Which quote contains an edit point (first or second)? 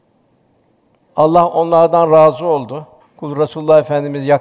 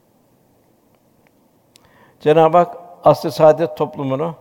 first